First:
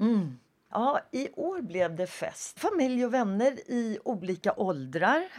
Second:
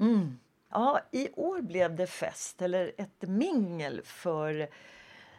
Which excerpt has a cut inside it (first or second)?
first